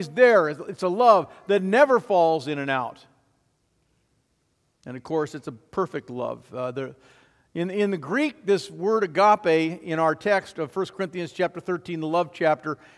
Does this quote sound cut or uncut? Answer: cut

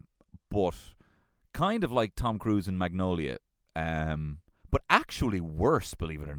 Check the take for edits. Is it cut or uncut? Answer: uncut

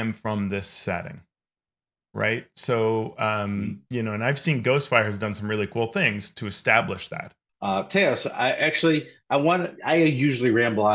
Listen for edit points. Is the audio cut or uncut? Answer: cut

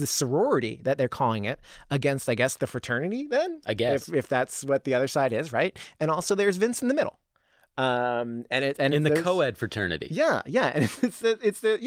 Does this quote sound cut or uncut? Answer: uncut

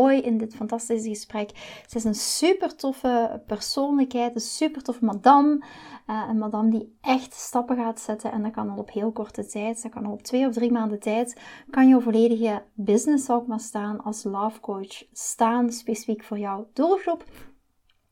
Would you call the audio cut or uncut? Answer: uncut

